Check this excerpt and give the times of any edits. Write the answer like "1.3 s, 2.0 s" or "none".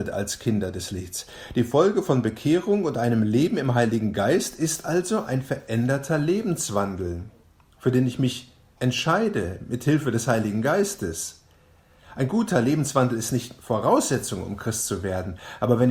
none